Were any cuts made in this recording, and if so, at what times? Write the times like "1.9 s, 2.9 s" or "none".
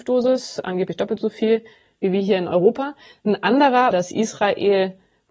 3.9 s